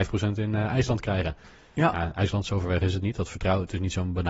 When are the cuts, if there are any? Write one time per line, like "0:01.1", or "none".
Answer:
none